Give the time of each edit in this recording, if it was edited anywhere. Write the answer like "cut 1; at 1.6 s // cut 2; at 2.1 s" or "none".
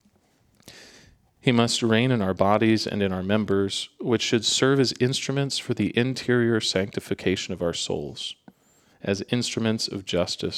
cut 1; at 8.9 s